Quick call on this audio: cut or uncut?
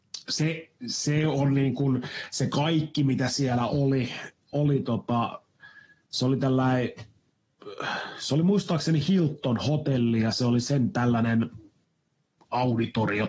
uncut